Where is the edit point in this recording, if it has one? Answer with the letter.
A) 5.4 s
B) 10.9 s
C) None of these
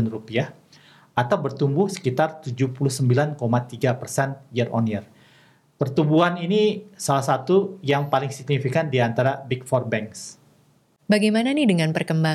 C